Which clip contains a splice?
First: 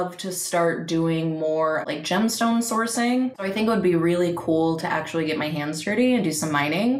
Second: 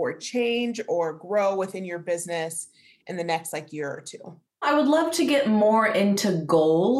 first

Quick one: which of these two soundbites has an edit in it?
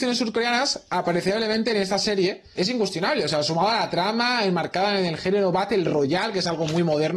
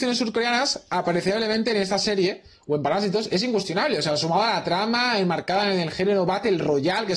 first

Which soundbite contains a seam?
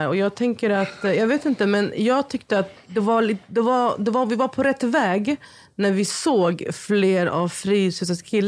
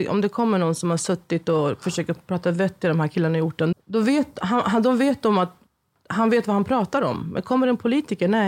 second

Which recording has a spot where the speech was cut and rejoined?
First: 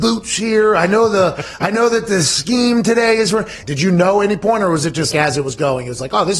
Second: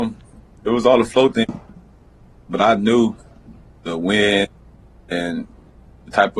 first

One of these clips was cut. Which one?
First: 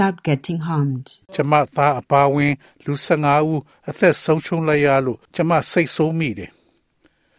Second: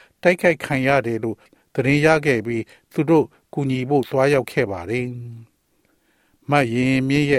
first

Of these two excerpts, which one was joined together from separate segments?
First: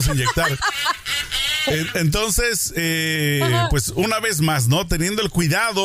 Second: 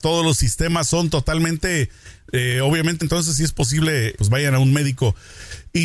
second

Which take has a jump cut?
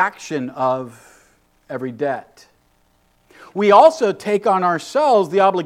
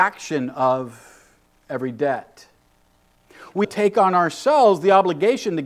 second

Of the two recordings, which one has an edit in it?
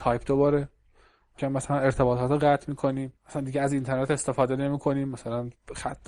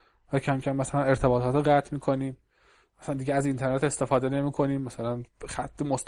first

